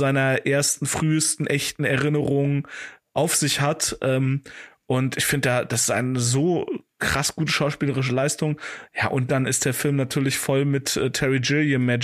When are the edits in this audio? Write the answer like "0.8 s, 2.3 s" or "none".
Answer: none